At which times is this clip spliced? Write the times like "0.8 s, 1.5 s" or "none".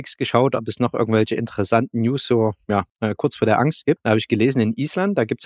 none